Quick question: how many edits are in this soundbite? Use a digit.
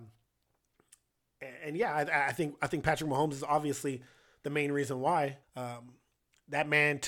1